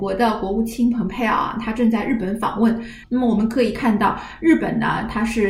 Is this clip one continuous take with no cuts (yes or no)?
no